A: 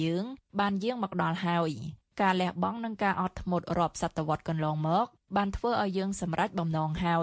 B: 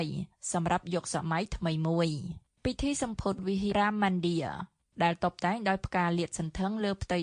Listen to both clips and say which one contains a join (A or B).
B